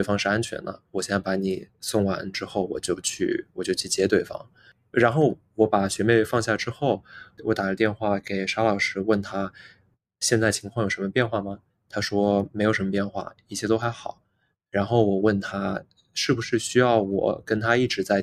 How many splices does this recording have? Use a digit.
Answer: 0